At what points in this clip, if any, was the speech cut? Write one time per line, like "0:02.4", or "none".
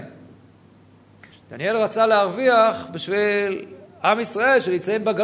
0:01.3